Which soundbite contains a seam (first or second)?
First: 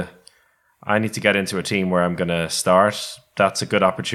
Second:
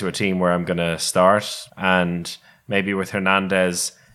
second